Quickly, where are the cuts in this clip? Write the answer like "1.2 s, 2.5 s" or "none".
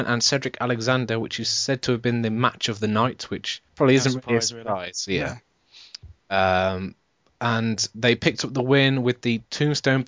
3.7 s